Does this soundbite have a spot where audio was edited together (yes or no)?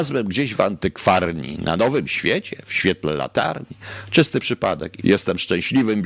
yes